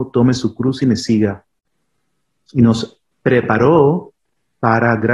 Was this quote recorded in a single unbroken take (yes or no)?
yes